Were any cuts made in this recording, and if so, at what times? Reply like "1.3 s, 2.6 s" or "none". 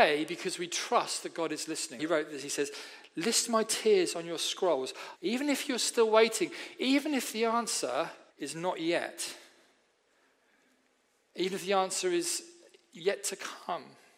2.0 s, 5.2 s, 8.3 s

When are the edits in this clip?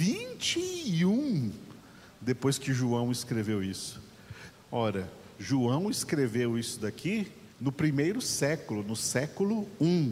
4.5 s, 7.5 s

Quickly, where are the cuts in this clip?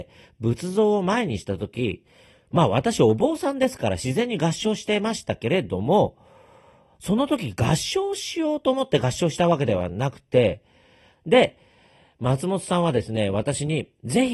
11.1 s

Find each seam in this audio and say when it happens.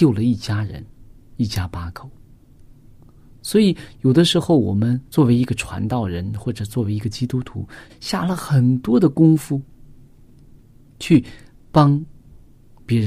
5.1 s, 7.9 s

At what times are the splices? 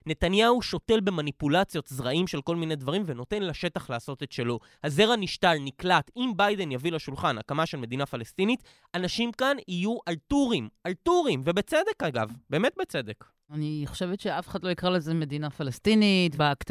none

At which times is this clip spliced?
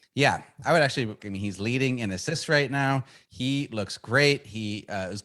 1.2 s

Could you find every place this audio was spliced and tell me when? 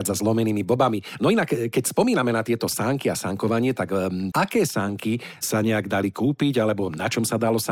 4.3 s

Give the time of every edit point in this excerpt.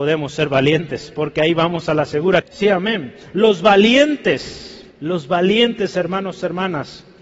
2.4 s, 4.9 s

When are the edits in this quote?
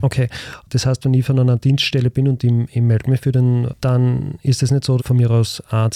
3.7 s, 5.0 s

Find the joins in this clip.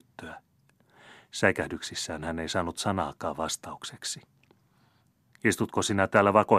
none

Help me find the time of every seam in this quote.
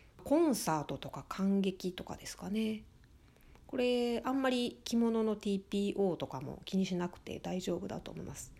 none

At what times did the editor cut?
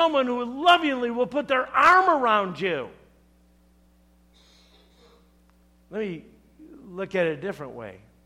none

